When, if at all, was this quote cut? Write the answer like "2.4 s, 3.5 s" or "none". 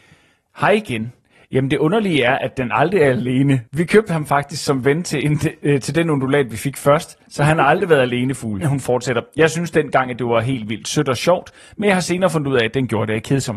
3.7 s, 8.6 s